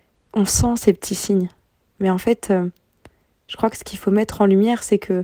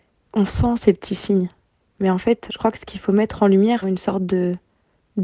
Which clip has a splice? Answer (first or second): second